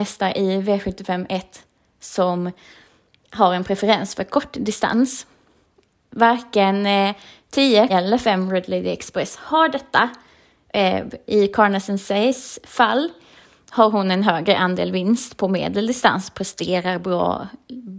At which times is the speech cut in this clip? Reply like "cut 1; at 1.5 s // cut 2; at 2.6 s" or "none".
cut 1; at 7.9 s